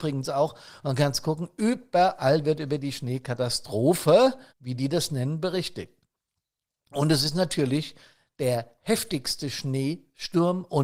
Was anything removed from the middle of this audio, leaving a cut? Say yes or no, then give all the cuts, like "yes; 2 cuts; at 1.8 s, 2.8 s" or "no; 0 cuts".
yes; 1 cut; at 4.5 s